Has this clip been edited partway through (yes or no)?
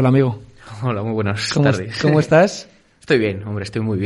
no